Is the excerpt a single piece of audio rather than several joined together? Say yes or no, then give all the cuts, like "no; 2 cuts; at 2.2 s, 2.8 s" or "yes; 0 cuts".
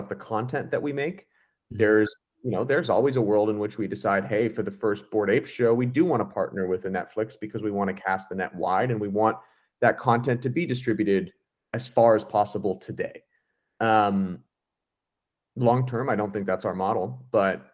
yes; 0 cuts